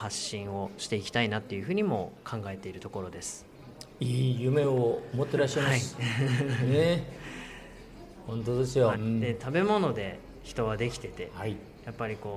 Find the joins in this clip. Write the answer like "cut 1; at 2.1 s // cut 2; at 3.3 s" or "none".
cut 1; at 8.9 s